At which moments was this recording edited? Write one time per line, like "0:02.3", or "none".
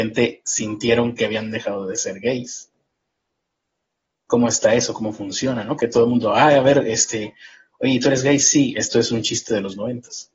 0:05.8